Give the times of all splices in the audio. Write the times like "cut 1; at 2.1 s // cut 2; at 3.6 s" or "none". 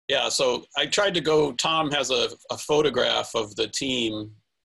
none